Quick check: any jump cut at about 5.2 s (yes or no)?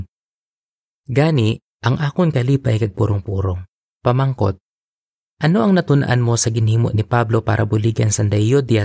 no